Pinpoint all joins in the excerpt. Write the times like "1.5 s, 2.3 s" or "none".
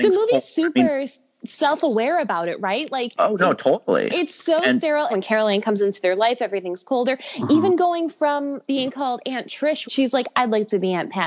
5.1 s, 8.6 s, 9.9 s